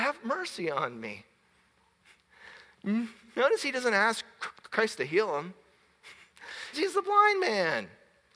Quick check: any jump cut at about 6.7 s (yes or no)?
yes